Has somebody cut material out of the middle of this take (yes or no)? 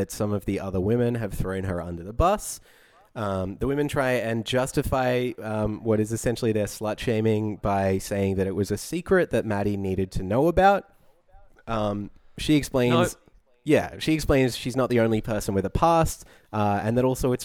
no